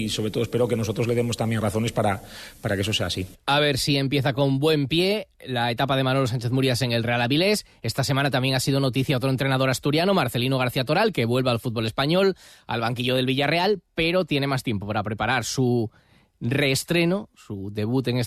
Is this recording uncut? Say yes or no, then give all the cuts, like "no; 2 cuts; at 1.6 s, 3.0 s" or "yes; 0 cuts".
yes; 0 cuts